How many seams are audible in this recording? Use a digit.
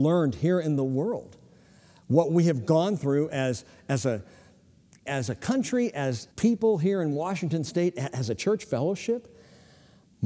2